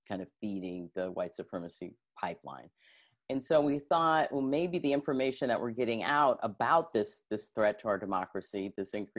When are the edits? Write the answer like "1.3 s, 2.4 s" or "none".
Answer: none